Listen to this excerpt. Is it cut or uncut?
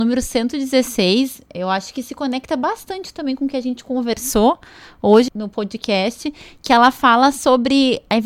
cut